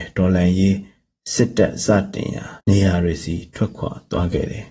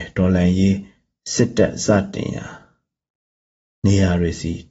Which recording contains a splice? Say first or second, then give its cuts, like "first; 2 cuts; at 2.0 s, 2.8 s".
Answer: first; 1 cut; at 2.6 s